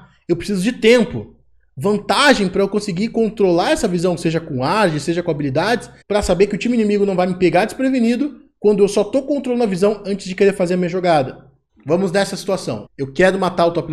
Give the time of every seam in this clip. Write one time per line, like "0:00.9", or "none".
0:06.0
0:11.7
0:12.9